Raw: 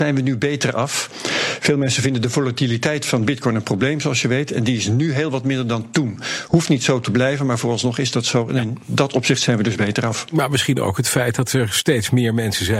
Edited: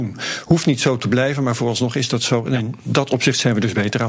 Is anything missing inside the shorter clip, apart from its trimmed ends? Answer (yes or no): no